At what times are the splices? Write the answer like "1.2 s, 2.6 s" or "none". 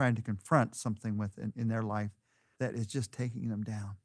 none